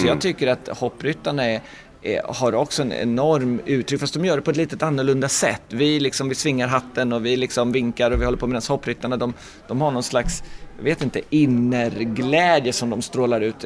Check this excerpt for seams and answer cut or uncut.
uncut